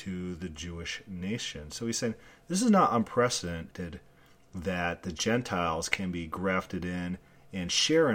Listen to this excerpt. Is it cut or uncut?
uncut